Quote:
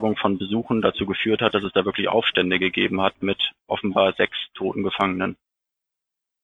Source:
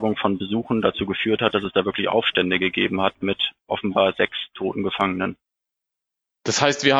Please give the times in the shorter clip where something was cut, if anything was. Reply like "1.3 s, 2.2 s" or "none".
none